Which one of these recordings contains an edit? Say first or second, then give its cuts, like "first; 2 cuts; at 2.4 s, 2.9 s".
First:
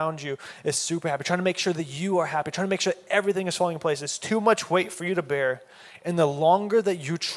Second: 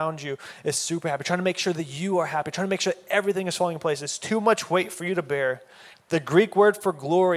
second; 1 cut; at 5.9 s